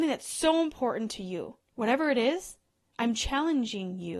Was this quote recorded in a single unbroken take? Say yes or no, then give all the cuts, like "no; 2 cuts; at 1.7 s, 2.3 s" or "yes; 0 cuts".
yes; 0 cuts